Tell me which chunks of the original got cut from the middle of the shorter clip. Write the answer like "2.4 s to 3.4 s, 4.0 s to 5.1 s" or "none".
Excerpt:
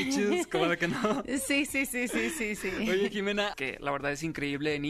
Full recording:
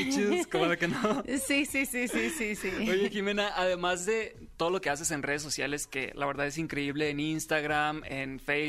3.5 s to 5.9 s